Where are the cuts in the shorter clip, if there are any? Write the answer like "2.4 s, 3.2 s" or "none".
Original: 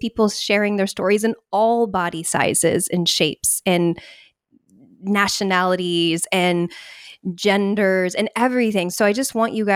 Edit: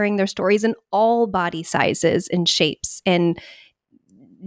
none